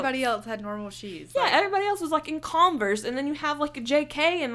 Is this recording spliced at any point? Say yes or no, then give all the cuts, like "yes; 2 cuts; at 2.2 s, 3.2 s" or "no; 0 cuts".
no; 0 cuts